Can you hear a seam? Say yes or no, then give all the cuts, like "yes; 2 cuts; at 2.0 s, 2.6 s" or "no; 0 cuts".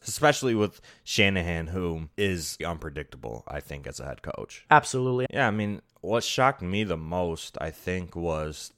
yes; 2 cuts; at 2.6 s, 5.3 s